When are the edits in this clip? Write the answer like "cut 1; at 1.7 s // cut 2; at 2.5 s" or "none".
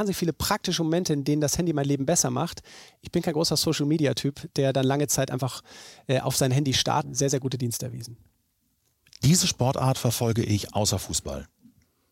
cut 1; at 7.0 s